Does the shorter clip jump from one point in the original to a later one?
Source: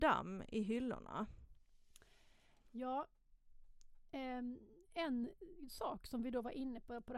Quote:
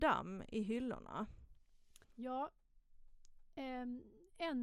yes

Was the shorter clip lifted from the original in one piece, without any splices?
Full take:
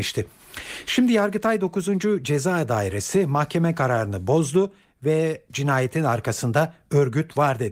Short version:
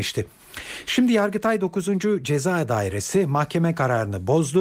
yes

